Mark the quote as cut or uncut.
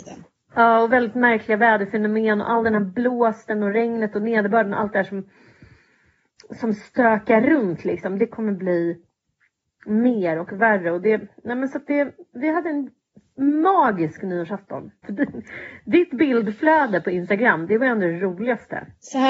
cut